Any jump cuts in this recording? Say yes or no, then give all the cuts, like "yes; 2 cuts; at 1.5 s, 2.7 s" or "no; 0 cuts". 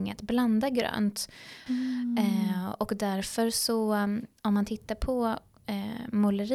yes; 1 cut; at 1.7 s